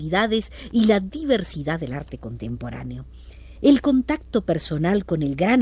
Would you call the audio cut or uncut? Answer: uncut